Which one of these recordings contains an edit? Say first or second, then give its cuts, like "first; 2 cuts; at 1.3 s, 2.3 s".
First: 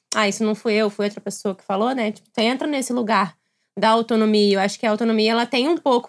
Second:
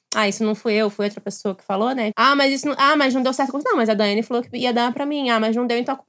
second; 1 cut; at 2.1 s